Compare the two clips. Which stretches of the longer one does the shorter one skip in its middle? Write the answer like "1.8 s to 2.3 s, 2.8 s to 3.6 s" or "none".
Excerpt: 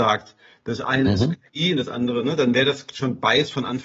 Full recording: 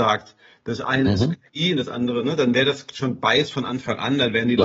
none